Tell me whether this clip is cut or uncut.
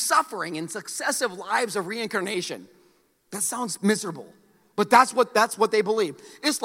uncut